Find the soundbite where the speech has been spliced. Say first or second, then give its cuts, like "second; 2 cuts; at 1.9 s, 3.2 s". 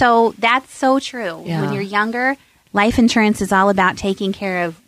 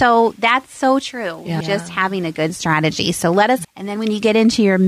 second; 2 cuts; at 1.6 s, 3.6 s